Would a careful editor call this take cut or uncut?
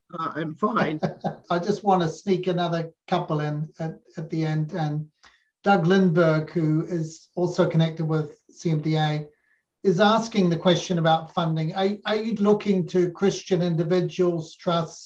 cut